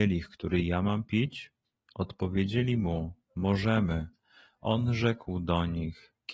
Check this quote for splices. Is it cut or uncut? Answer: uncut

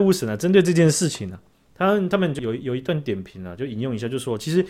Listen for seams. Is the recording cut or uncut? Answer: cut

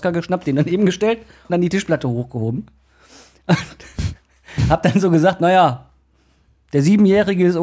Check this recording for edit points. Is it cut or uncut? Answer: cut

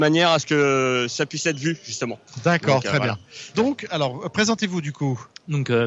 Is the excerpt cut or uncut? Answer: cut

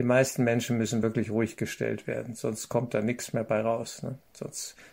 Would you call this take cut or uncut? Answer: uncut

